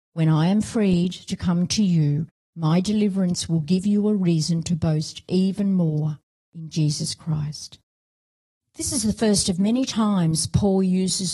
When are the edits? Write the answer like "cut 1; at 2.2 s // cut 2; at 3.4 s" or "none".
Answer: none